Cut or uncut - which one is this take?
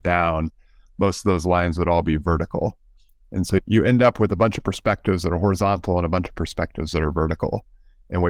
uncut